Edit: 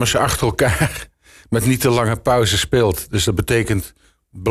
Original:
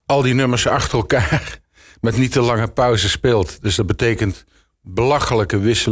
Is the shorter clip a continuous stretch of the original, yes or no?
yes